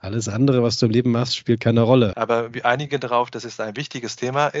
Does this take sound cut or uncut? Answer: cut